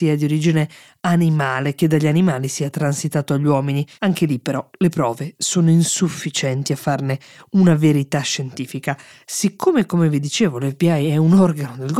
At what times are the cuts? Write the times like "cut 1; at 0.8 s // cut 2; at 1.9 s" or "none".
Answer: cut 1; at 3.9 s